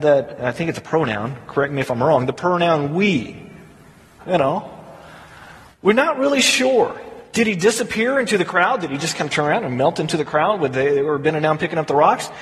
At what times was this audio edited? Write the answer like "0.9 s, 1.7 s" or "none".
4.2 s